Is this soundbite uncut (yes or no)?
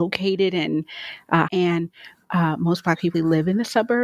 no